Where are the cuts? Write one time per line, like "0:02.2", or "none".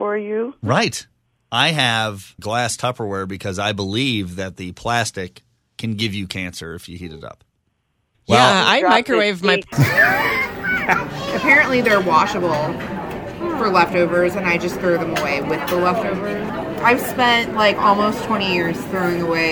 0:02.4
0:08.1
0:09.7